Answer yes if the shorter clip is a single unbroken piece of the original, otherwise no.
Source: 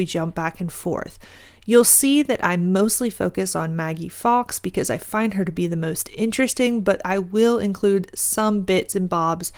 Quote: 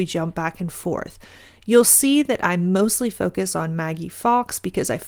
yes